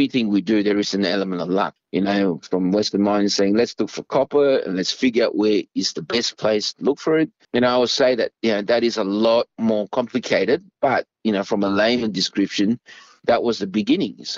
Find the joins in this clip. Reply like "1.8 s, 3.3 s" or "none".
1.8 s, 7.4 s